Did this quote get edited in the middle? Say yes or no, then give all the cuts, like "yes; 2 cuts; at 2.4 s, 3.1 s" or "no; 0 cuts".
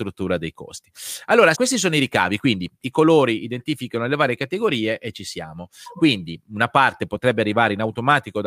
yes; 1 cut; at 1.5 s